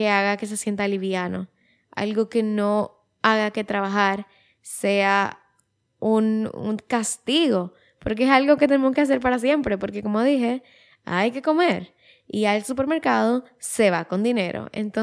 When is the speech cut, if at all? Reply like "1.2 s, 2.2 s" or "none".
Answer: none